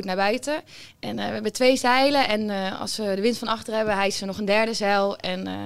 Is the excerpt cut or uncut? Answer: uncut